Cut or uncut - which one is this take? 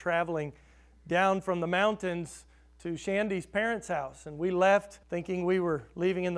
cut